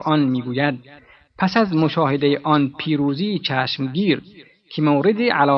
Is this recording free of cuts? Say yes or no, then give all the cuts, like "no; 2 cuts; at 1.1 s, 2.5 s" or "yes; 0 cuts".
yes; 0 cuts